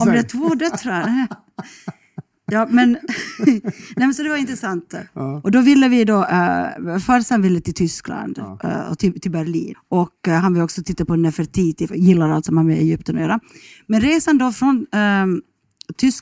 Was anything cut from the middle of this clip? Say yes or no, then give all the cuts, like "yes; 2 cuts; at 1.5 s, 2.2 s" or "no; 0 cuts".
yes; 2 cuts; at 9.7 s, 11.9 s